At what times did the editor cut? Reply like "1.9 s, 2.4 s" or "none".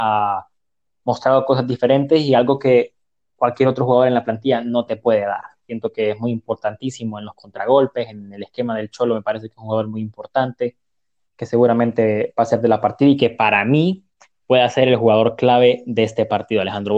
none